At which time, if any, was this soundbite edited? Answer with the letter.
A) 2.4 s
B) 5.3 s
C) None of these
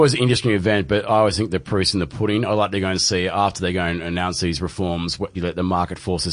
B